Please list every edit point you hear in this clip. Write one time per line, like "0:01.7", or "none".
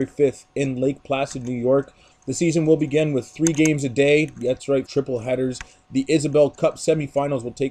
0:02.1
0:04.9